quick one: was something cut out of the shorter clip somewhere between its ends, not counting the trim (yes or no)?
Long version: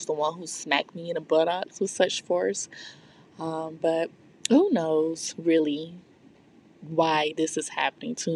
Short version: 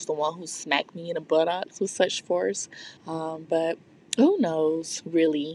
yes